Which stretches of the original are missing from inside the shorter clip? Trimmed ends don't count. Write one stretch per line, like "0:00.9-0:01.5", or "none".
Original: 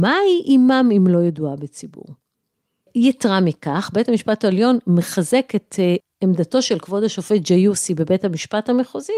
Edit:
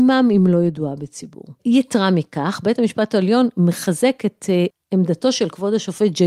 0:02.2-0:02.9